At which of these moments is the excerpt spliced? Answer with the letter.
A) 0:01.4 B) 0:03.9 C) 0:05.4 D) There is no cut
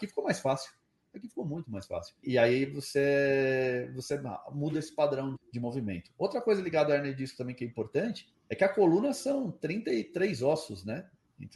C